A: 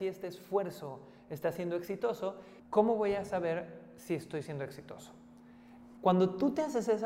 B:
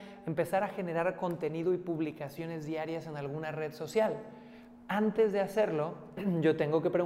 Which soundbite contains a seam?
A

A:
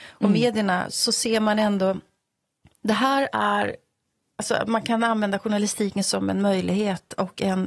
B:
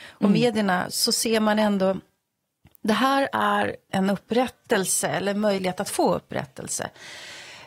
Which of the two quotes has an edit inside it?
B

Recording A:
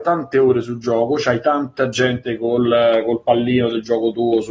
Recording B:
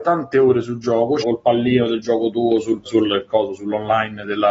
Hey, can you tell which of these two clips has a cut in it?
B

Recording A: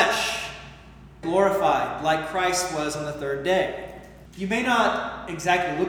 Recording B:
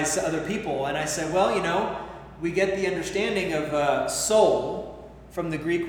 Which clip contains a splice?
A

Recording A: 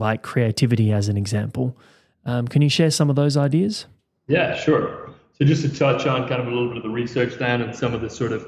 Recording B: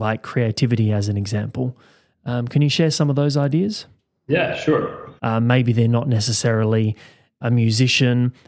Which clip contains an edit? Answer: B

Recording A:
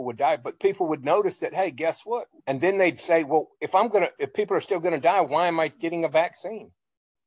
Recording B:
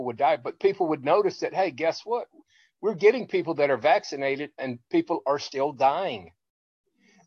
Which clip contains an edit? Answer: A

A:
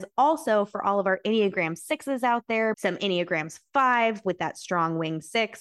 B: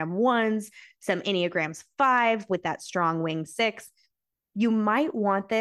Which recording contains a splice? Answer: A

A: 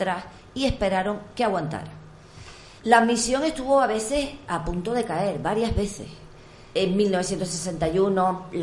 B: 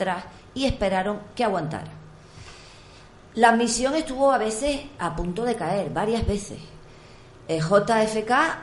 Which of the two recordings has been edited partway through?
A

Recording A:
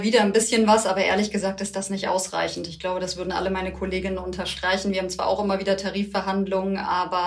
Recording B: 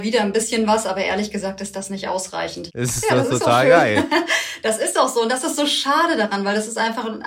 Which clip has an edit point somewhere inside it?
B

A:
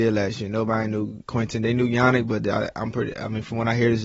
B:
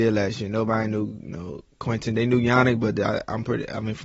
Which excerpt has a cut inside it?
A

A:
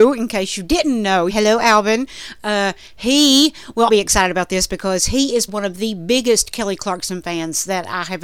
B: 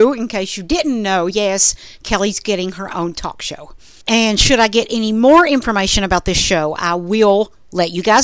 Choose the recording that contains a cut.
A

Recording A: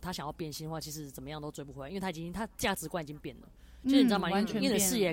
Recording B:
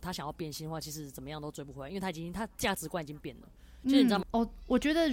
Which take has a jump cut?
B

